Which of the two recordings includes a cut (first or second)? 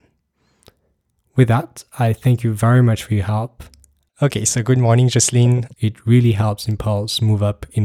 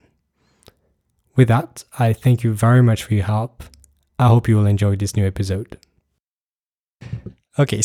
first